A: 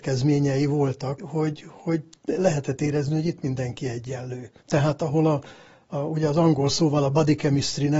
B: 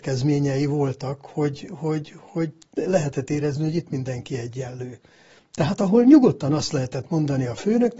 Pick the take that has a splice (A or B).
A